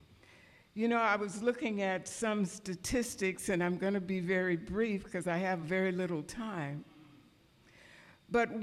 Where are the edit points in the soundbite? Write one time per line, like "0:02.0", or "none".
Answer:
none